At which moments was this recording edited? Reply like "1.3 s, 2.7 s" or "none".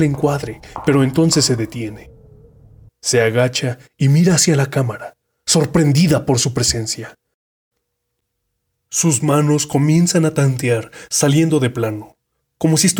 2.9 s